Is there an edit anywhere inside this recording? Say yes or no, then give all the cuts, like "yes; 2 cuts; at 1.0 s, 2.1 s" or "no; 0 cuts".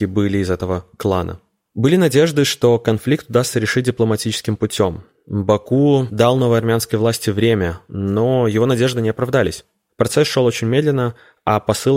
no; 0 cuts